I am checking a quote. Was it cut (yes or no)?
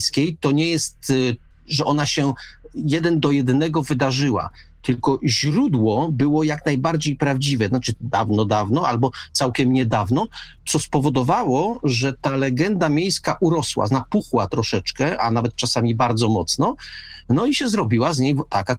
yes